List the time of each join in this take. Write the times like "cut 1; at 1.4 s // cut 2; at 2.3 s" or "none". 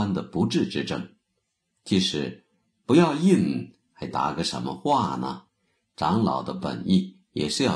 cut 1; at 1.7 s // cut 2; at 5.5 s